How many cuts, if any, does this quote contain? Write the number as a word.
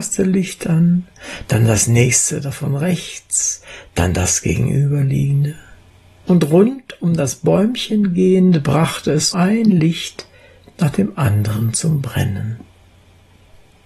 one